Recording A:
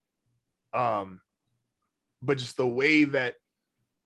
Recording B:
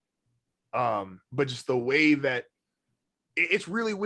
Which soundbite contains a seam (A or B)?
B